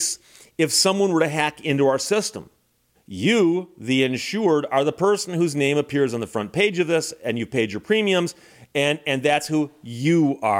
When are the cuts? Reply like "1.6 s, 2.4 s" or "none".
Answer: 2.9 s